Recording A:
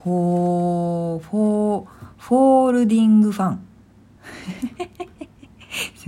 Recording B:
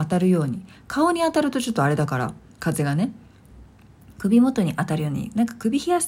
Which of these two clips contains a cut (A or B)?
A